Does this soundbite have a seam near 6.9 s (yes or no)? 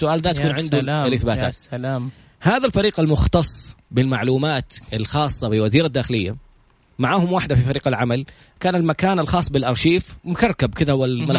no